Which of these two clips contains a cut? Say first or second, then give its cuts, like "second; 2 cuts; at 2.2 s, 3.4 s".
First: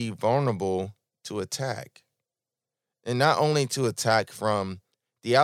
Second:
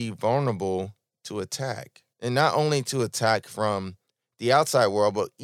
second; 1 cut; at 2.1 s